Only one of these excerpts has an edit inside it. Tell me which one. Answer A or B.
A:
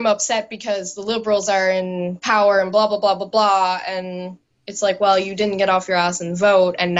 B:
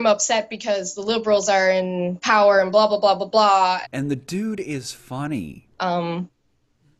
B